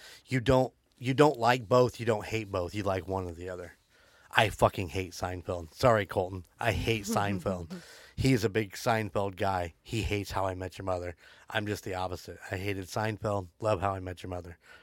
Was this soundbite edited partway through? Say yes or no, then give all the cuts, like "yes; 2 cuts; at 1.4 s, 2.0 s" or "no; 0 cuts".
no; 0 cuts